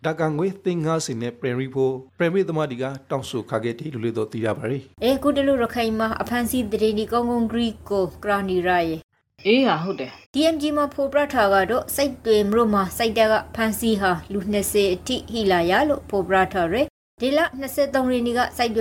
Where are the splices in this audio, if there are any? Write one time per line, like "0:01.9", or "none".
0:04.9
0:10.2